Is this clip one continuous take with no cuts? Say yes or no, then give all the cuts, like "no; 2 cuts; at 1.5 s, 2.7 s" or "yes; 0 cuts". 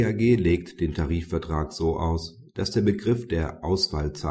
yes; 0 cuts